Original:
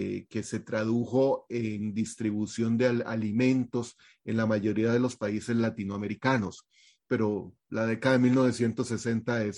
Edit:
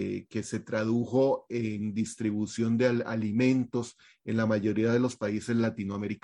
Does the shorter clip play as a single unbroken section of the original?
yes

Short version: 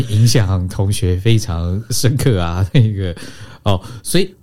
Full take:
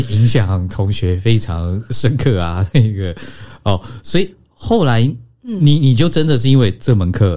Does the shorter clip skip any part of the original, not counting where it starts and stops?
no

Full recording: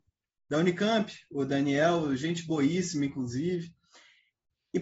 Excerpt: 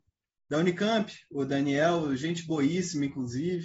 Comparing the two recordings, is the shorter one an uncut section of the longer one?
yes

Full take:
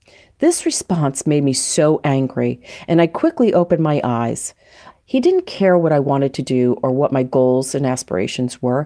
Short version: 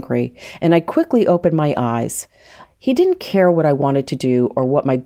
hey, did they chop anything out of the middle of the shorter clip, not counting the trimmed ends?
no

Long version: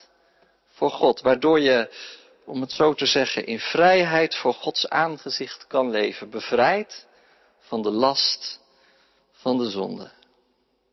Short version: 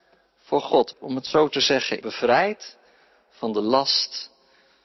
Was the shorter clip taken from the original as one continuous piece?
no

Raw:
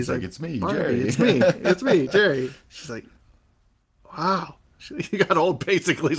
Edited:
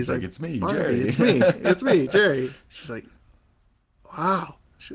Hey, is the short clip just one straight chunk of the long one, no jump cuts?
yes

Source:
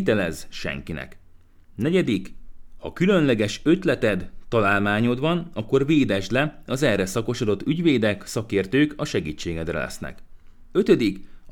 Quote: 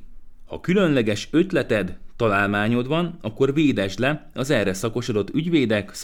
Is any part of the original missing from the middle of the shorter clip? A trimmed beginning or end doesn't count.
no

